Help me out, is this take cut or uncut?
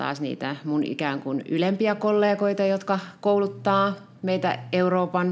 uncut